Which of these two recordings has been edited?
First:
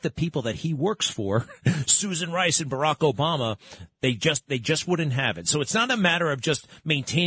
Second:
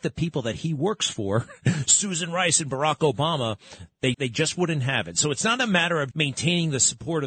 second; 2 cuts; at 4.1 s, 6.1 s

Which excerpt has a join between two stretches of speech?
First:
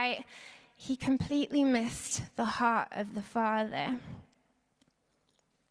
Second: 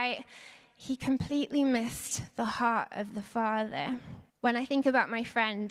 second; 1 cut; at 4.3 s

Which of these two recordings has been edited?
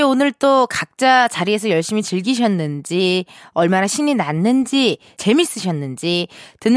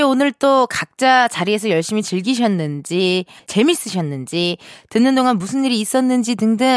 second; 1 cut; at 3.4 s

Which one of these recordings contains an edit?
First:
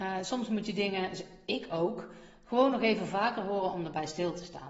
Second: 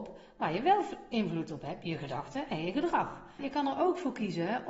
second; 1 cut; at 3.4 s

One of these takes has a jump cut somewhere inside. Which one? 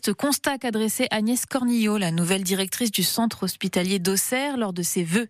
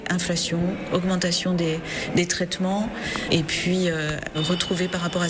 second; 1 cut; at 4.3 s

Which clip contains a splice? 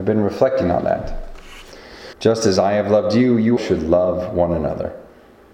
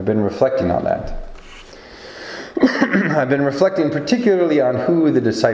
first; 2 cuts; at 2.1 s, 3.6 s

